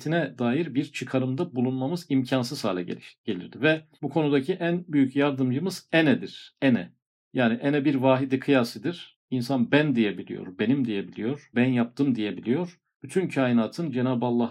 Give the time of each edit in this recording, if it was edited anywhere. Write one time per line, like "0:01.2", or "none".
0:11.5
0:13.0